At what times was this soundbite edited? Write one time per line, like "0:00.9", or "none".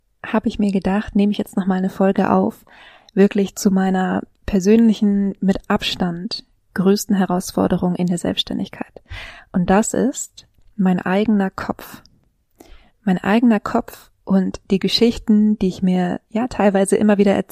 none